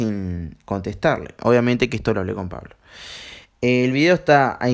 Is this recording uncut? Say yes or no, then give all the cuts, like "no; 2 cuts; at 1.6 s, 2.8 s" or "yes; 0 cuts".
no; 2 cuts; at 1.4 s, 3.5 s